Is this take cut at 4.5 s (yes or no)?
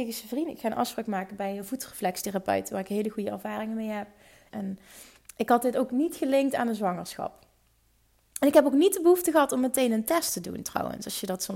yes